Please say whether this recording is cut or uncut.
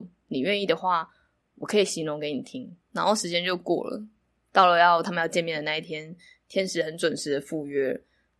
cut